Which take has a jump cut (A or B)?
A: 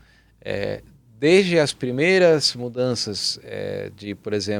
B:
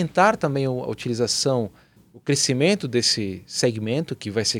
B